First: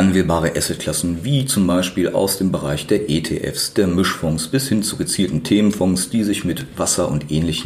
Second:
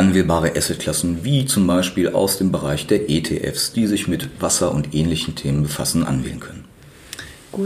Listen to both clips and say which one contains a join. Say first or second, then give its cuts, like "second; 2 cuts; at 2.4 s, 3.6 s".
second; 1 cut; at 3.7 s